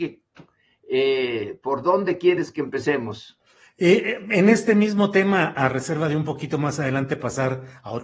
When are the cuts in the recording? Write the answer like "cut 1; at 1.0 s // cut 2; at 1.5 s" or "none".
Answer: none

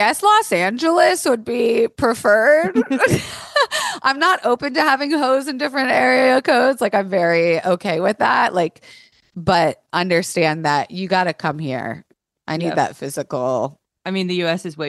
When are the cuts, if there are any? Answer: none

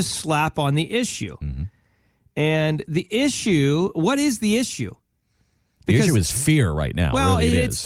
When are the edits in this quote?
none

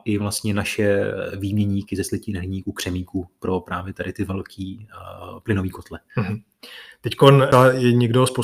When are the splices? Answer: none

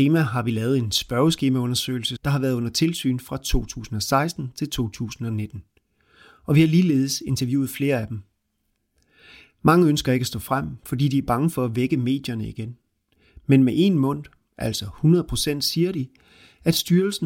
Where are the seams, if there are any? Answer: cut 1; at 2.2 s

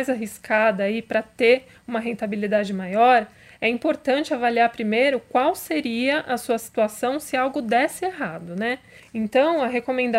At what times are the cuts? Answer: cut 1; at 9.0 s

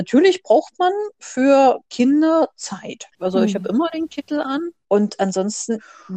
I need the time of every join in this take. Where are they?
cut 1; at 3.2 s

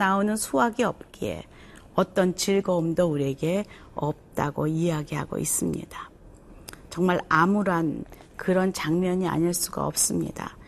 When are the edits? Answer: none

